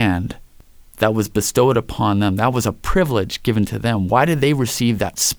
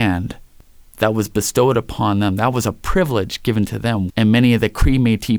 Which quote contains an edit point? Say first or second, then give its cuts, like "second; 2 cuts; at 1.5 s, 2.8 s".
second; 1 cut; at 4.1 s